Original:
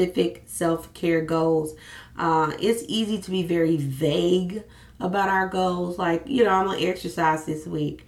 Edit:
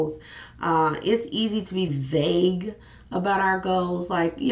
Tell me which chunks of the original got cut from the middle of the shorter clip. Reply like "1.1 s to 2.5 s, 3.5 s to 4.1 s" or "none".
3.4 s to 3.8 s

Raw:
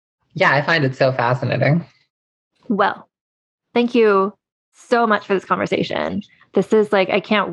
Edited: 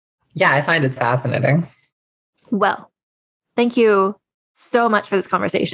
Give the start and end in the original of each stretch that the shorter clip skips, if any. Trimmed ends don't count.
1.0 s to 1.1 s

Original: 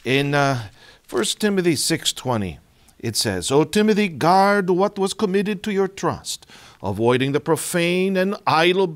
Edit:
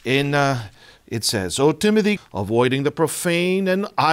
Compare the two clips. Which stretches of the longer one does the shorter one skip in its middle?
1.0 s to 2.9 s, 4.1 s to 6.7 s

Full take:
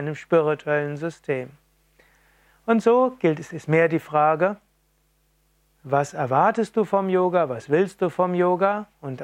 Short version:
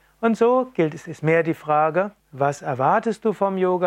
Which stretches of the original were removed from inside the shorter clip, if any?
4.6 s to 5.7 s

